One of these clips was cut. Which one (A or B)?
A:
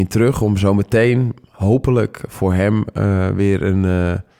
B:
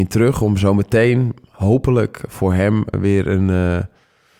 B